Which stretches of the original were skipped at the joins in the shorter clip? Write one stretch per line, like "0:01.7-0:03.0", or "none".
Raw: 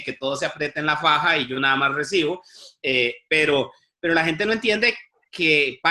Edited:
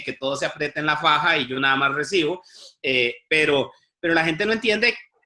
none

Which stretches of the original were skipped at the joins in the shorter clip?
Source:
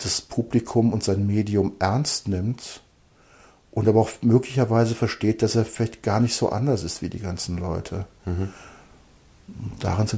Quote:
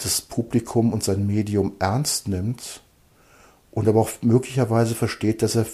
none

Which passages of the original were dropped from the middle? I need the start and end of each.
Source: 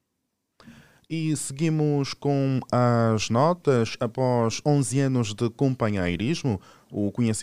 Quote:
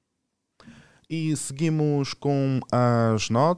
none

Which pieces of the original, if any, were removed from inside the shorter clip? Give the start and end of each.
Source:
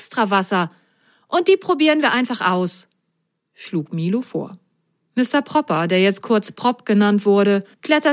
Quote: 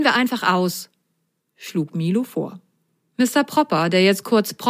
none

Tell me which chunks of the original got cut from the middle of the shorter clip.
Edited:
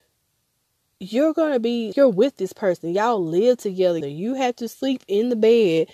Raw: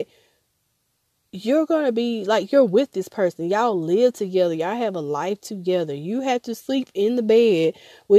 0:02.2-0:02.5
0:04.6-0:05.9

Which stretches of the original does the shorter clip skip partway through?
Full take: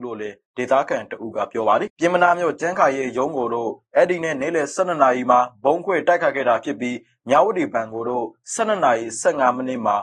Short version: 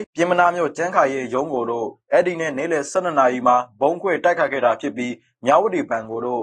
none

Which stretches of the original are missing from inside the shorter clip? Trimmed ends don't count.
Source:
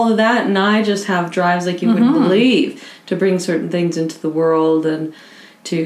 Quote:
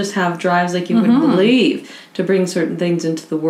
none

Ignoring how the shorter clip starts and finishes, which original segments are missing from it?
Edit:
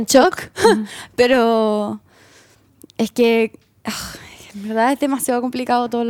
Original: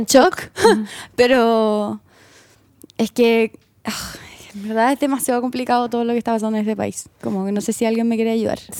none

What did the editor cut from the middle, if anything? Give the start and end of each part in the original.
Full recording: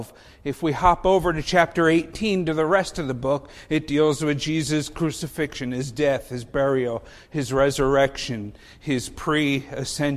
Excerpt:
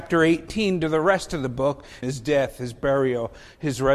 0:03.7-0:05.7

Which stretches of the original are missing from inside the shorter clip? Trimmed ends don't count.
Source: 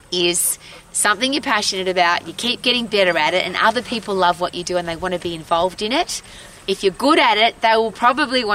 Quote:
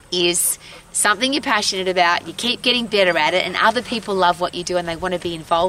none

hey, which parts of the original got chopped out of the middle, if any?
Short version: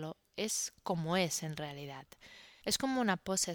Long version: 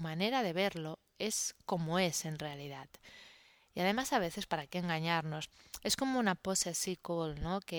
0:03.4-0:05.8

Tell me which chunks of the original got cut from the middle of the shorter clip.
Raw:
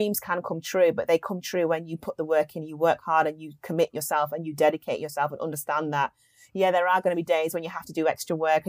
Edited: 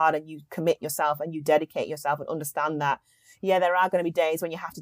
none

